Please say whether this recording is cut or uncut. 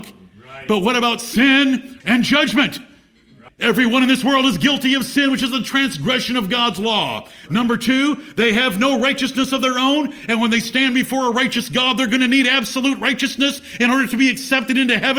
cut